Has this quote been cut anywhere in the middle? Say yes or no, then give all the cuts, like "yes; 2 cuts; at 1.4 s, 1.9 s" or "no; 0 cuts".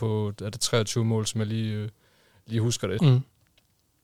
yes; 1 cut; at 3.0 s